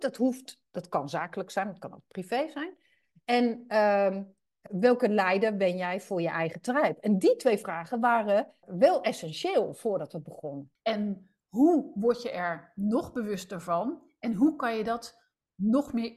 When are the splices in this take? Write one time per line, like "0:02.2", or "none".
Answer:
0:04.7
0:08.6
0:10.8